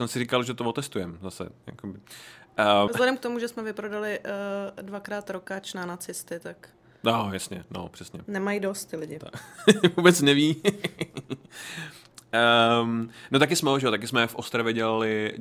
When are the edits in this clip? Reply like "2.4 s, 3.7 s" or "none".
2.9 s